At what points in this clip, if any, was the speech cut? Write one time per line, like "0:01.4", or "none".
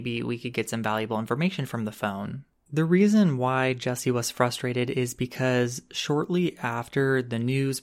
0:02.7